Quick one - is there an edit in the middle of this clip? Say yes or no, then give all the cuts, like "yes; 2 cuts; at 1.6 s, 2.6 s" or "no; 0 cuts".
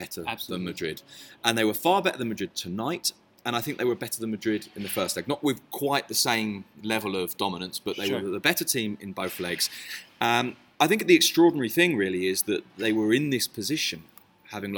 no; 0 cuts